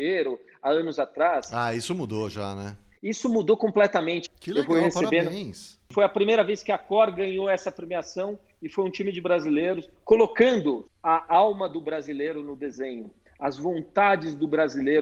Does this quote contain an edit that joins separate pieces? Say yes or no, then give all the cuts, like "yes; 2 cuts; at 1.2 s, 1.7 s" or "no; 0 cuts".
yes; 2 cuts; at 4.3 s, 10.9 s